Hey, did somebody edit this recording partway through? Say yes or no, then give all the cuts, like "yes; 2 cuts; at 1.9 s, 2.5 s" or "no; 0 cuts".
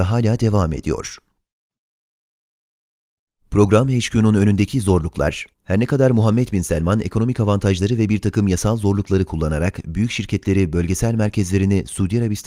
yes; 1 cut; at 5.5 s